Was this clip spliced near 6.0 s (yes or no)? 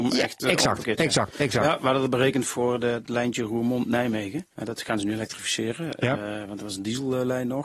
no